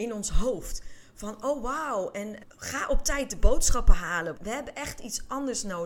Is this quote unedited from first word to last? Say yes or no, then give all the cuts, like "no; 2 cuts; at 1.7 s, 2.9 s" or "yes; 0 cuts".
no; 2 cuts; at 2.4 s, 4.3 s